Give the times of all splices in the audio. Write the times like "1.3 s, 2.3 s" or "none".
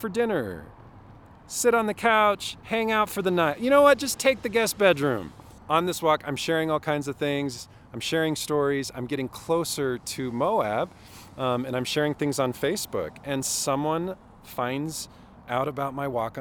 5.6 s